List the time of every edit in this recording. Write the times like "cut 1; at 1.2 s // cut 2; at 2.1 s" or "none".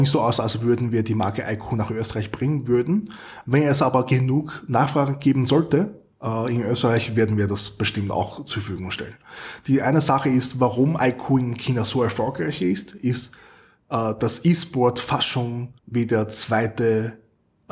cut 1; at 15.8 s